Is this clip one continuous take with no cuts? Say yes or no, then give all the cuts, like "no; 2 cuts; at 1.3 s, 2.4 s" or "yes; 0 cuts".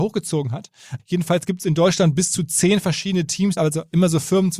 no; 2 cuts; at 1.0 s, 3.6 s